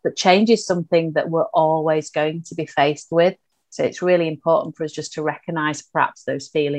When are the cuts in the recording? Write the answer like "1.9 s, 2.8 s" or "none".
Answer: none

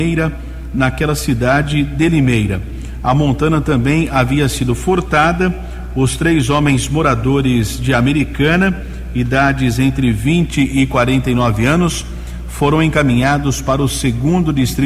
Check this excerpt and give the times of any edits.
none

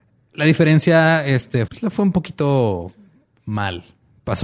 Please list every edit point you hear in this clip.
1.7 s

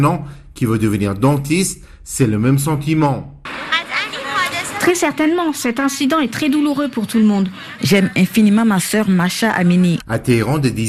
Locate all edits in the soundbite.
7.8 s, 10.0 s

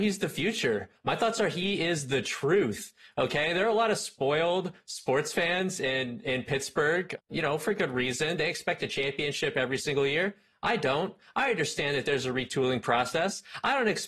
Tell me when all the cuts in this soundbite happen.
none

